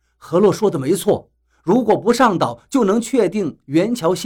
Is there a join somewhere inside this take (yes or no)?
no